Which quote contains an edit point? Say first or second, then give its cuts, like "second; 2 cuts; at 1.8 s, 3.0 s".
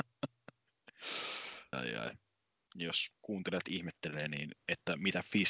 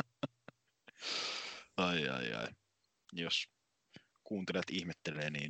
first; 2 cuts; at 1.7 s, 3.2 s